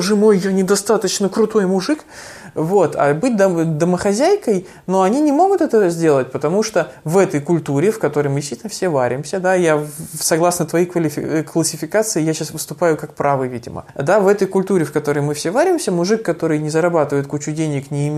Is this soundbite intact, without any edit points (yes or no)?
yes